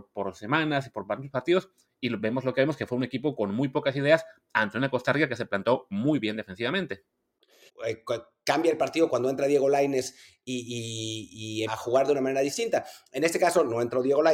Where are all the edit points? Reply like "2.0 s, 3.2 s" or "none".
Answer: 7.7 s, 9.1 s, 11.7 s